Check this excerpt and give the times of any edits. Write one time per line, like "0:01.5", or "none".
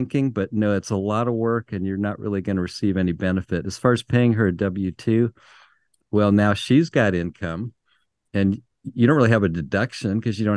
none